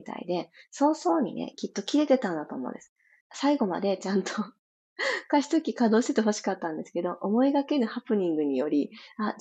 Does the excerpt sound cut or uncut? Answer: cut